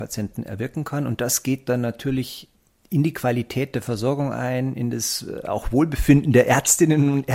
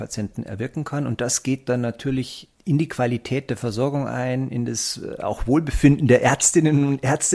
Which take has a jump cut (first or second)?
second